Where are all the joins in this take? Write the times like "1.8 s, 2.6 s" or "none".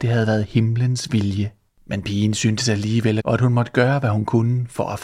1.7 s, 3.2 s